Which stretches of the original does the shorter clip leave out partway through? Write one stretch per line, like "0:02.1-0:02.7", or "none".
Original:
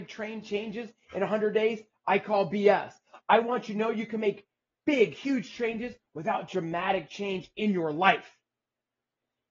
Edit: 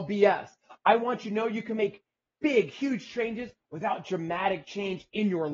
none

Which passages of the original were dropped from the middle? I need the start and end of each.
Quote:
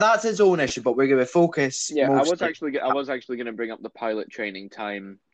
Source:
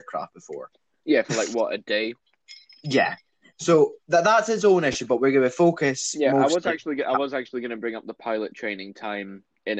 none

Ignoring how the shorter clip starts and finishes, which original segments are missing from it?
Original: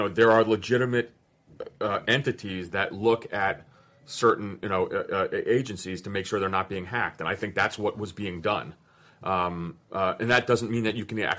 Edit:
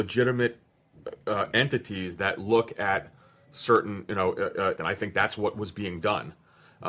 0:05.3-0:07.2

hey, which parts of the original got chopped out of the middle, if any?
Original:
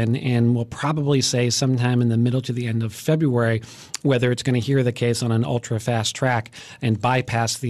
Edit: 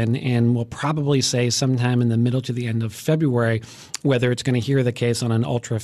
none

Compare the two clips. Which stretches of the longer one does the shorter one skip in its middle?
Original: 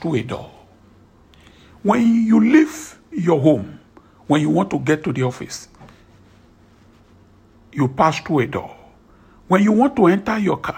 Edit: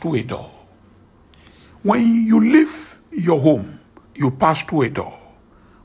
0:04.0-0:07.6

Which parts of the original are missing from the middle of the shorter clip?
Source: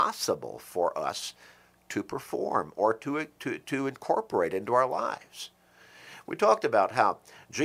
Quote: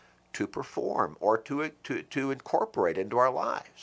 none

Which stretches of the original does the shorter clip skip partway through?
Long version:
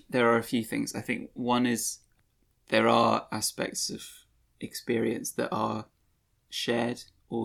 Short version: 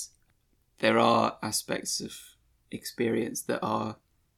none

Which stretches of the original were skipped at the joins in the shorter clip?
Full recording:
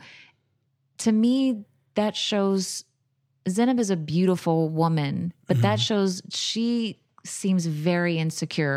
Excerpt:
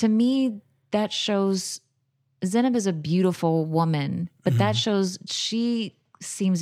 none

